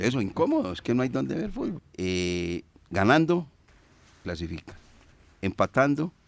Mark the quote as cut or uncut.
cut